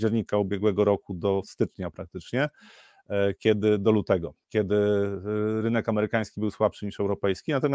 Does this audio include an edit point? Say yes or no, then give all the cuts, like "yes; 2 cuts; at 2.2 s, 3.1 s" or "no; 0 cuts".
no; 0 cuts